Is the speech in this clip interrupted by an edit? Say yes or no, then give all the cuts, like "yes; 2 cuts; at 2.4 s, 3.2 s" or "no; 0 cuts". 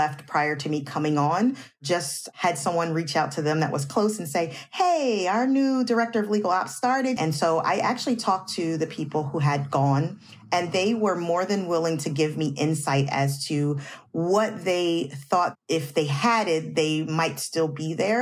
yes; 1 cut; at 7.2 s